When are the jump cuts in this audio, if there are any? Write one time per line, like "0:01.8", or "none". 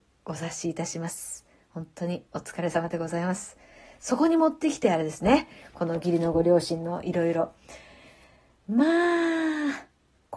none